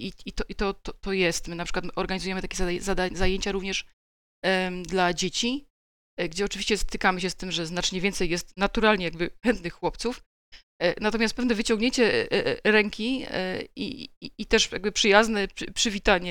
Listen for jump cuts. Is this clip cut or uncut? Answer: uncut